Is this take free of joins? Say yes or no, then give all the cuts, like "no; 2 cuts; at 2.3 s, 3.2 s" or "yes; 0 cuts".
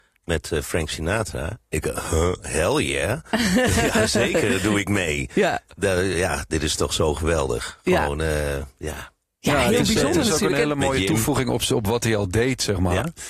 yes; 0 cuts